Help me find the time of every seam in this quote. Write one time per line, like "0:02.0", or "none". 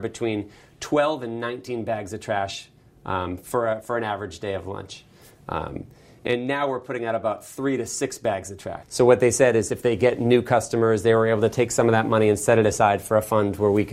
0:08.8